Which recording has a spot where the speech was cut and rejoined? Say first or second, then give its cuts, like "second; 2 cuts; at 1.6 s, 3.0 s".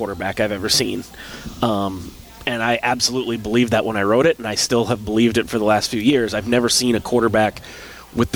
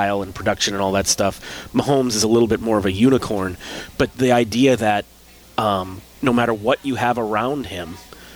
second; 1 cut; at 4.1 s